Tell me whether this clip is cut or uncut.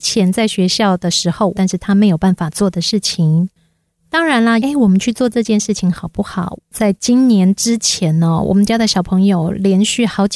cut